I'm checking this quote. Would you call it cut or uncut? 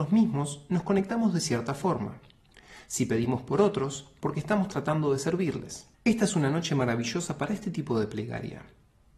cut